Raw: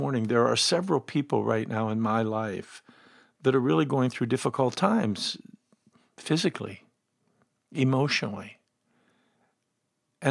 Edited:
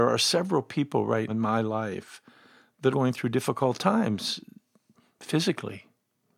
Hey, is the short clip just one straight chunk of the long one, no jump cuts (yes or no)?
no